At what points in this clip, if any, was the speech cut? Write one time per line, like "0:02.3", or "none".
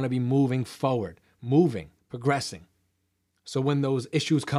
0:02.0